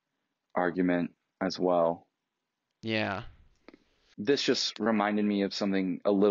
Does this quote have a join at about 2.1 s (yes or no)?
no